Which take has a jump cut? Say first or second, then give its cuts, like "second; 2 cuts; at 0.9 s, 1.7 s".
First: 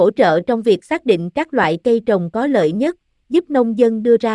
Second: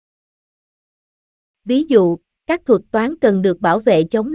second; 1 cut; at 1.5 s